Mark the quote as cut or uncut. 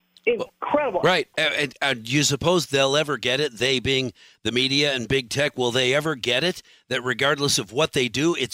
cut